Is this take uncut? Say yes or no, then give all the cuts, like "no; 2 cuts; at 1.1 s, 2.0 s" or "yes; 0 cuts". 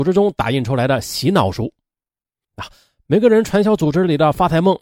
no; 1 cut; at 2.4 s